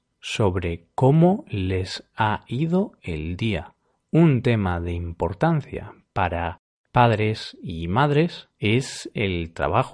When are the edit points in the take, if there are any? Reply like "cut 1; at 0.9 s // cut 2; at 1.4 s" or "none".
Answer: cut 1; at 3.9 s // cut 2; at 8.5 s